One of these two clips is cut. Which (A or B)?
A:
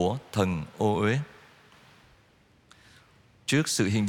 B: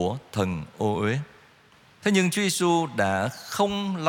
B